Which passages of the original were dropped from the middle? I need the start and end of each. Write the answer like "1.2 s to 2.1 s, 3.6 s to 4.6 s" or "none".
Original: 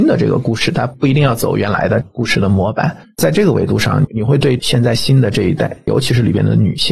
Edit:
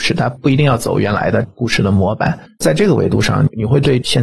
none